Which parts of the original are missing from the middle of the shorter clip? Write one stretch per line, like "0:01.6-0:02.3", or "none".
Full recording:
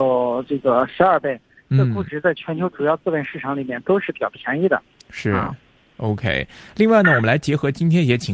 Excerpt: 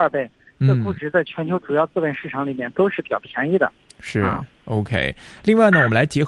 0:05.6-0:05.9